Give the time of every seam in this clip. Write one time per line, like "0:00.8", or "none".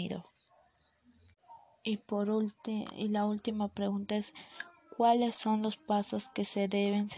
none